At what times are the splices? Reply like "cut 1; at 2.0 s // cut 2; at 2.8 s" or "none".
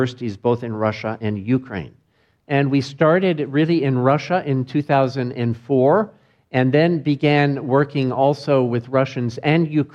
cut 1; at 2.4 s